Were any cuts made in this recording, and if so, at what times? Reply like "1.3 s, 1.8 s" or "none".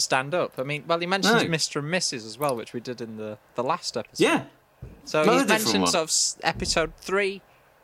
none